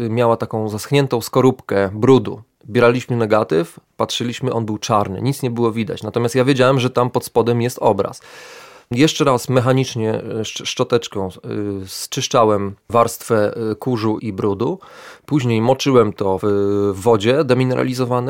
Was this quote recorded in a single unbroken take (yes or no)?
no